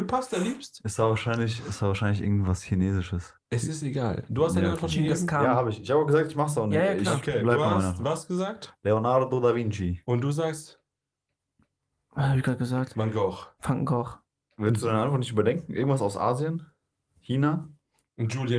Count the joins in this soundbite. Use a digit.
1